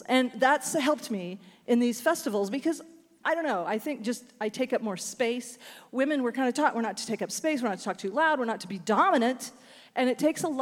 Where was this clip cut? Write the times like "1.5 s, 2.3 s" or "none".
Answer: none